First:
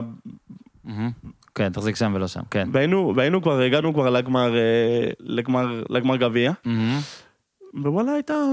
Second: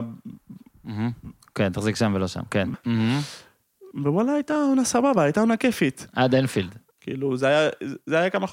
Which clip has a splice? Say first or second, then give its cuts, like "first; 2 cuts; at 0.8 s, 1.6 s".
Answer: second; 2 cuts; at 2.7 s, 6.9 s